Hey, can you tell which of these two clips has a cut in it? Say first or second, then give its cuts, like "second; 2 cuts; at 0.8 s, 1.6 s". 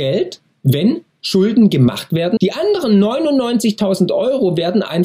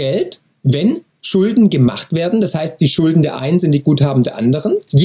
first; 1 cut; at 2.4 s